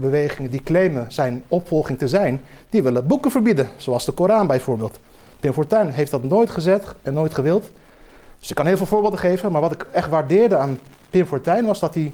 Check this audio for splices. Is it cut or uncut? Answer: uncut